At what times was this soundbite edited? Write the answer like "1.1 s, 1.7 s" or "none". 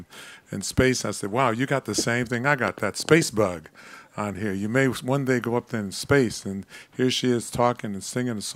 none